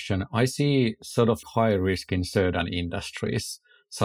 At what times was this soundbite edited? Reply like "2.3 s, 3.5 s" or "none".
1.4 s

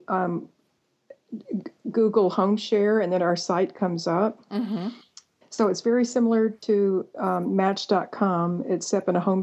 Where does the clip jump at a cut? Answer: 5.4 s

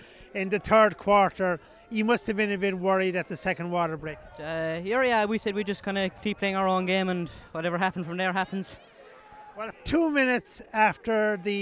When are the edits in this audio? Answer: 9.7 s

